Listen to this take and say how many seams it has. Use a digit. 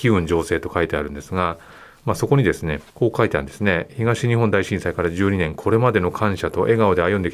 1